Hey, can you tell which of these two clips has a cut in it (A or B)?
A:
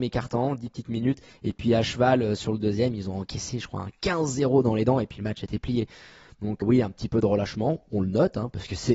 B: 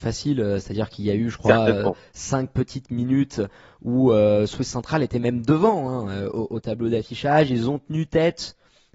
A